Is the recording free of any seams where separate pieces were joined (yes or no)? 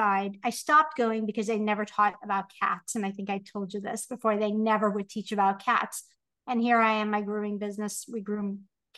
yes